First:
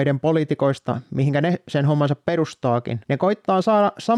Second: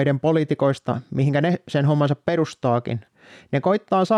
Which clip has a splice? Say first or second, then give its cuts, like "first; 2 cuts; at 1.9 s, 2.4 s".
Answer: first; 1 cut; at 3.0 s